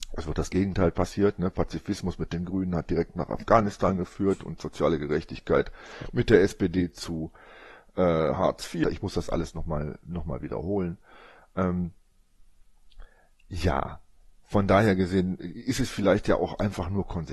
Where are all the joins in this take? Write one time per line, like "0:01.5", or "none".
0:08.8
0:15.4